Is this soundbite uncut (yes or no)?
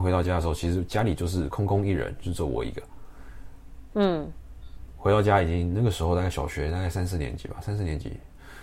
yes